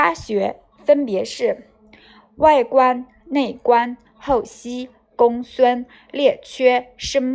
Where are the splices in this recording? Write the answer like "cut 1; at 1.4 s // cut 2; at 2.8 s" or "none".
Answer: none